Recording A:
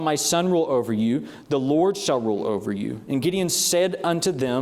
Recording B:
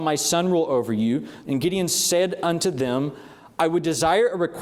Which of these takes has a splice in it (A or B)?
B